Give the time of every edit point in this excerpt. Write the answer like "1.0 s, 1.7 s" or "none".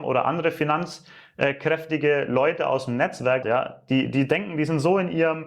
3.4 s